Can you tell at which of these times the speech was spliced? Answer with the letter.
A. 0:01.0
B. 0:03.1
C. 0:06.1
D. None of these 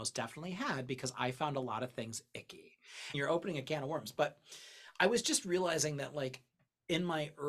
B